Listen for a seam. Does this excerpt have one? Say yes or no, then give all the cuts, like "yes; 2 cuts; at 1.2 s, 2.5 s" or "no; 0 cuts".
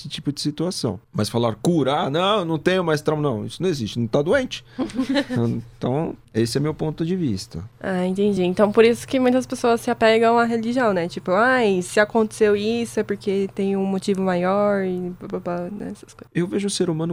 no; 0 cuts